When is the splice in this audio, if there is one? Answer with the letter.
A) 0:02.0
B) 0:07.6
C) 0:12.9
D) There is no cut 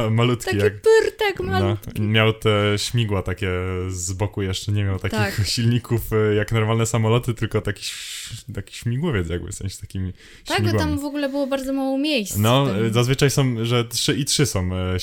B